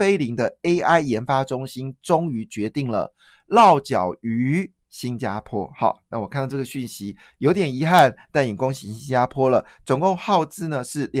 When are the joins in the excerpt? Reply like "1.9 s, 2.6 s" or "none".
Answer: 4.8 s

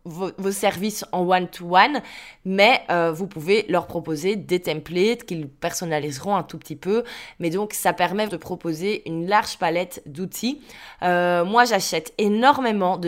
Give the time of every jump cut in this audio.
8.3 s

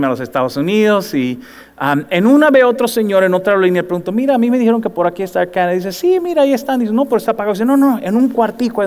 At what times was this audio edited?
none

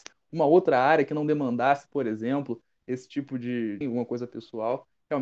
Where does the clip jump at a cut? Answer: 3.8 s

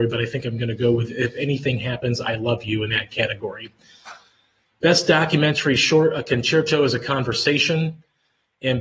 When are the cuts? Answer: none

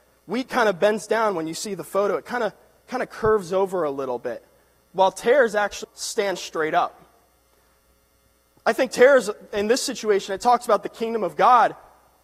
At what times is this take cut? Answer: 5.8 s

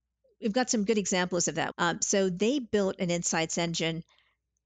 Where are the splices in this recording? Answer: 1.7 s

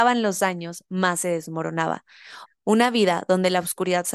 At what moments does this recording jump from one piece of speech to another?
2.5 s

